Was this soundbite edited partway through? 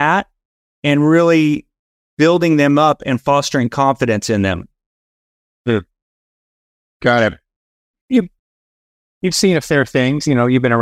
yes; 1 cut; at 7.9 s

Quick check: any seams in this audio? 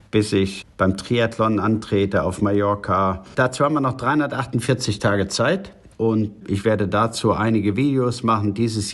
yes; 2 cuts; at 3.4 s, 5.9 s

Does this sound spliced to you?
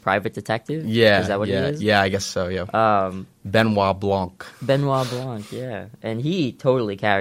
no; 0 cuts

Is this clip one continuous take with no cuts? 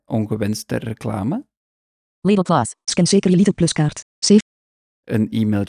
yes; 0 cuts

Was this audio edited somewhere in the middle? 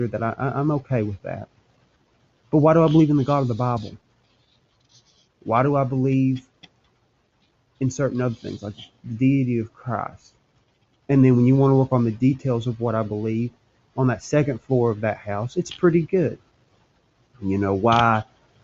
yes; 1 cut; at 11.0 s

